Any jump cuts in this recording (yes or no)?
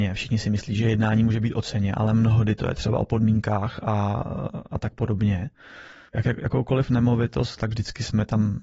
yes